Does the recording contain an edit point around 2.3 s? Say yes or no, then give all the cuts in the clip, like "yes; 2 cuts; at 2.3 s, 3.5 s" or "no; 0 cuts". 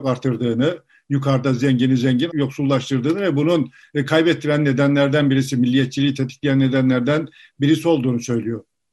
yes; 1 cut; at 2.3 s